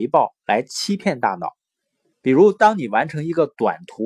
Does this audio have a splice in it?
yes; 1 cut; at 2.1 s

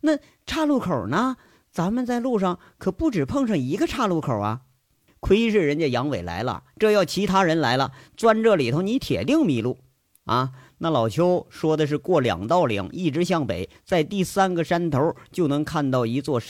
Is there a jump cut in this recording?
yes; 2 cuts; at 5.1 s, 10.2 s

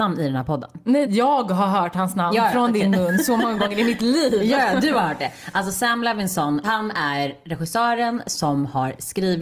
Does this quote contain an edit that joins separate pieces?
yes; 1 cut; at 1.0 s

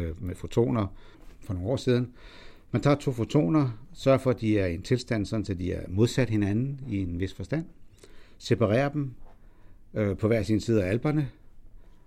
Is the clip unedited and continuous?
yes; 0 cuts

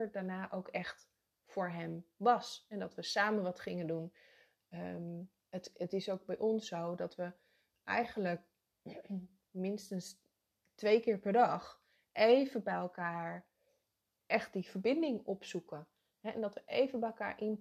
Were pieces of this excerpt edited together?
yes; 1 cut; at 5.4 s

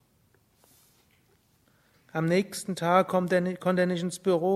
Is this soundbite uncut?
no; 1 cut; at 1.9 s

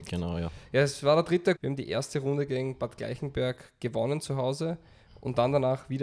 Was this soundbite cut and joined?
yes; 1 cut; at 1.6 s

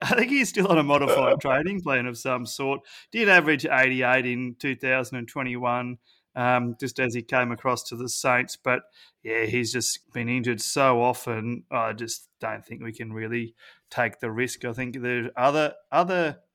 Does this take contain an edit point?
yes; 1 cut; at 10.0 s

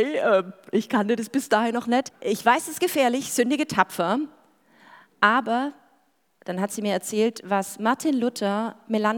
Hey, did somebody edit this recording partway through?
yes; 1 cut; at 2.1 s

